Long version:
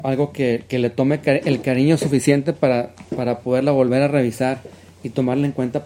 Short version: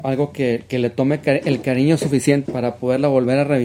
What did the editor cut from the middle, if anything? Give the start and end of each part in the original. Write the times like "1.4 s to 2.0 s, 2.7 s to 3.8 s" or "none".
2.4 s to 3.1 s